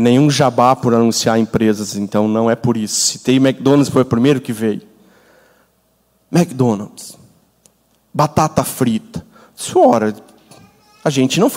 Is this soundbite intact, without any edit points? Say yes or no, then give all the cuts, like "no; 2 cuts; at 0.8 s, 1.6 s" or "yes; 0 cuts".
yes; 0 cuts